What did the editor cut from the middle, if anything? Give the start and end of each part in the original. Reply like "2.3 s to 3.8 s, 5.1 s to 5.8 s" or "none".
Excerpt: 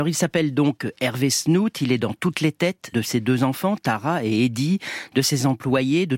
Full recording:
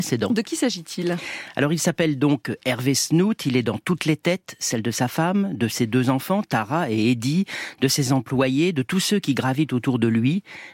4.6 s to 5.6 s